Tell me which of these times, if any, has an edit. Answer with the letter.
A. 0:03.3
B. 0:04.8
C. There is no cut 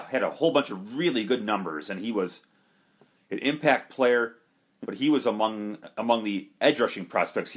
B